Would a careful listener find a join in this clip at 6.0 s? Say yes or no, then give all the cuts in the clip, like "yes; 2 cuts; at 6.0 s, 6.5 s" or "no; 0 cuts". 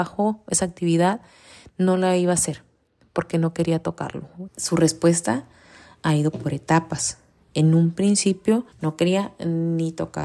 no; 2 cuts; at 4.5 s, 8.7 s